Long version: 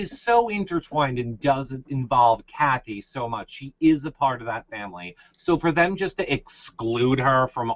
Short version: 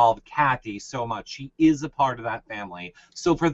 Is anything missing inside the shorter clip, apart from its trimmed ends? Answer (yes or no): no